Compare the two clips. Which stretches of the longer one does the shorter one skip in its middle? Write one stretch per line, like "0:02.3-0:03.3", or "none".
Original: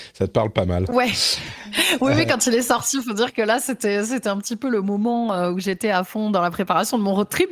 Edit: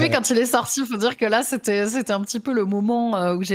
none